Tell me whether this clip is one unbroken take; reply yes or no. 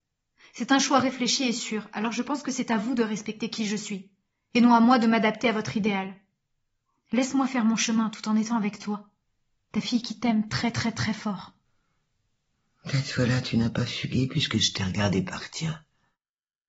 yes